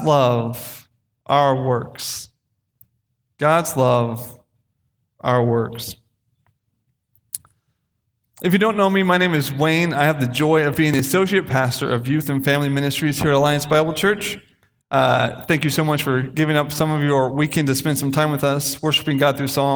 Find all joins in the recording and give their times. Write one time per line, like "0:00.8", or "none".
none